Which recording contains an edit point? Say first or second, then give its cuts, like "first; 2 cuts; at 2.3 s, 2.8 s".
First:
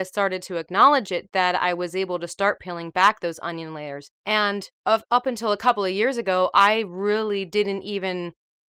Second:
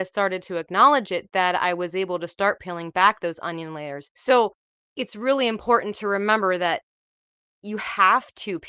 first; 1 cut; at 4.1 s